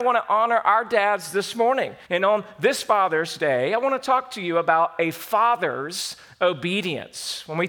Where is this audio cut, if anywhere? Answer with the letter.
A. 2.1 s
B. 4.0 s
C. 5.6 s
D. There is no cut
A